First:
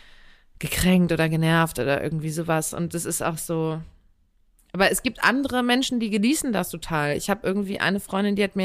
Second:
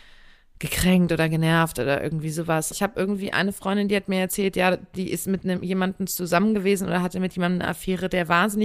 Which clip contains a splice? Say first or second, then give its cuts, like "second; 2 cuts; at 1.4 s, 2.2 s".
second; 1 cut; at 2.7 s